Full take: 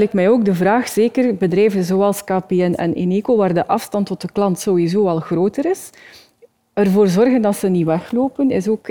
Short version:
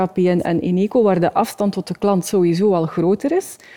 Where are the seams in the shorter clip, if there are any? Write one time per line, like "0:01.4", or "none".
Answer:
none